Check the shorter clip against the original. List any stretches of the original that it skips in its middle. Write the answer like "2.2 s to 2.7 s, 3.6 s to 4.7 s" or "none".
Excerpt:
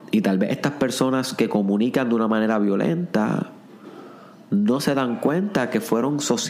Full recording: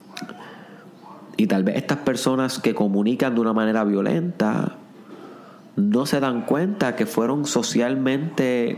none